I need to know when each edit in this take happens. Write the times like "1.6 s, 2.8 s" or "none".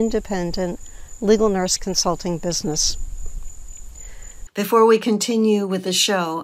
4.5 s